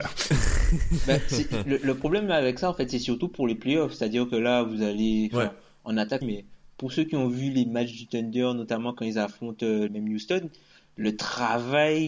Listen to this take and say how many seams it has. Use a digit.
2